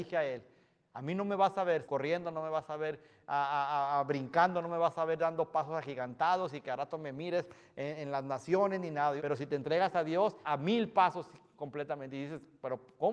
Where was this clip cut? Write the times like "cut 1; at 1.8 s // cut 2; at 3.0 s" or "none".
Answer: cut 1; at 1.8 s // cut 2; at 9.2 s // cut 3; at 10.4 s